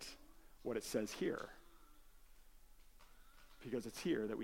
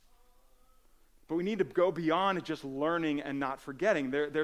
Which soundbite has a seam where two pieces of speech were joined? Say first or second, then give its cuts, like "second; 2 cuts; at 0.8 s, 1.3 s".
second; 1 cut; at 1.1 s